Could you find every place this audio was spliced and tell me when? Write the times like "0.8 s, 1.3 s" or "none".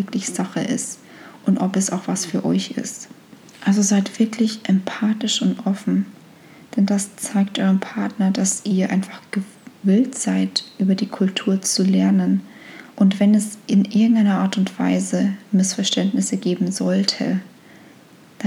12.9 s